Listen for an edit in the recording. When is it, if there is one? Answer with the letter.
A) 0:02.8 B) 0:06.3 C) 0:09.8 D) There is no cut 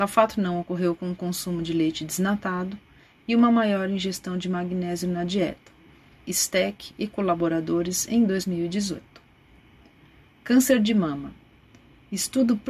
B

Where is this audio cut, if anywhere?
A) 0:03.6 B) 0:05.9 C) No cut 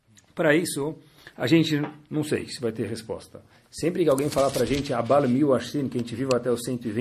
A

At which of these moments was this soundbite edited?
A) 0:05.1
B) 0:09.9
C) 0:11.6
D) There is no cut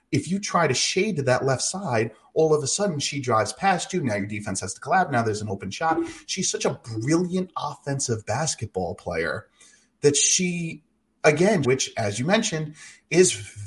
C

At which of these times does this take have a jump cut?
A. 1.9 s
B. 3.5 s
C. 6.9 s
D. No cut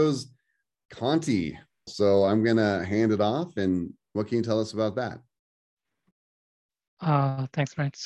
A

